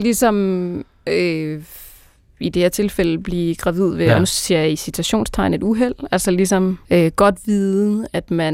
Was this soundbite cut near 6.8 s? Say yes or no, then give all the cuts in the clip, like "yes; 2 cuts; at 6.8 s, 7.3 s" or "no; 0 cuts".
yes; 1 cut; at 6.8 s